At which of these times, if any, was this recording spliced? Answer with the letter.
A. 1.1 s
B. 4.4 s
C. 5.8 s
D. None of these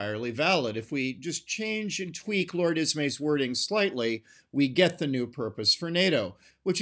D